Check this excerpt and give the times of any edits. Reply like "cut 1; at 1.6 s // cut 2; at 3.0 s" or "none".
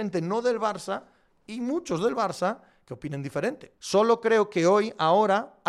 cut 1; at 3.8 s